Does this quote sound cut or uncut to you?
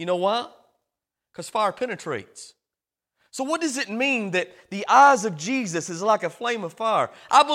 uncut